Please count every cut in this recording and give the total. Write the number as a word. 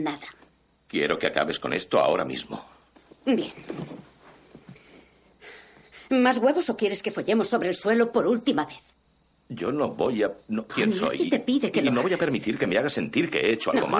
one